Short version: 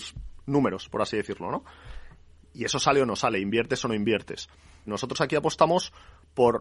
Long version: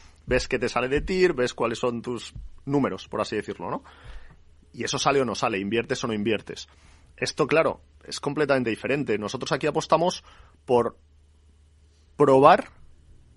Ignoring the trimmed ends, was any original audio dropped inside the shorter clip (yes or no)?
yes